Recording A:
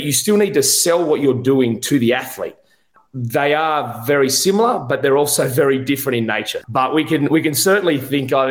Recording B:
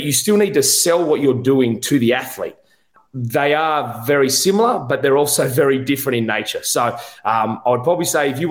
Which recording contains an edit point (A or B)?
A